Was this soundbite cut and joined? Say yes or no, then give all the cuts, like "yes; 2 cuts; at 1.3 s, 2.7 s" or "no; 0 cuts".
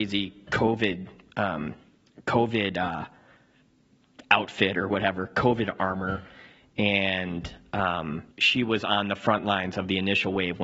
yes; 1 cut; at 8.3 s